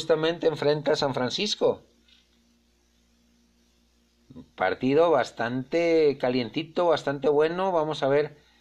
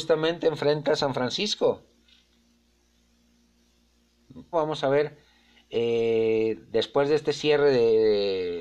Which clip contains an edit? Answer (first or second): second